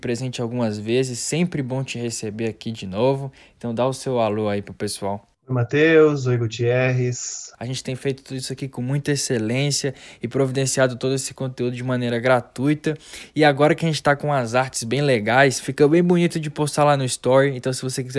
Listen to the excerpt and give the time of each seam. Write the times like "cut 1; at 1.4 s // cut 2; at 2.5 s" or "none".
cut 1; at 7.5 s